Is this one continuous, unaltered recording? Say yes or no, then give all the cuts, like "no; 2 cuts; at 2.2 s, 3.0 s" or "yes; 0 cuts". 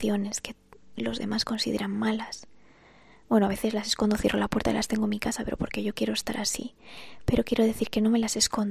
yes; 0 cuts